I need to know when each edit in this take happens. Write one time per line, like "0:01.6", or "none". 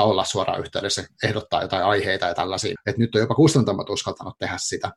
0:02.8